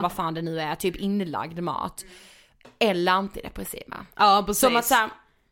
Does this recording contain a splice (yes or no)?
no